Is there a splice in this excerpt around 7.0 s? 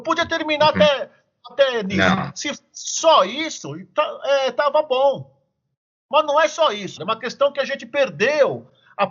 yes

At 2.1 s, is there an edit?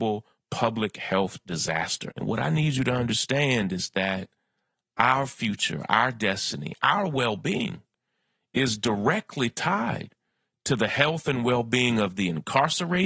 yes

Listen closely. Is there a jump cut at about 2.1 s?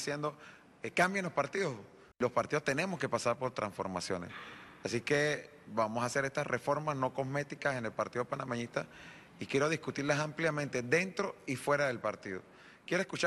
yes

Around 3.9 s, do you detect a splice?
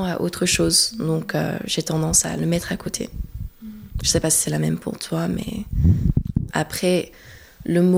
no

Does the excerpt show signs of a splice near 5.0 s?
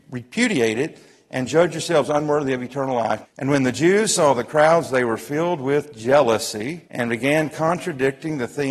no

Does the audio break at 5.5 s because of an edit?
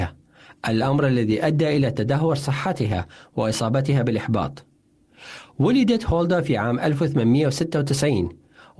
no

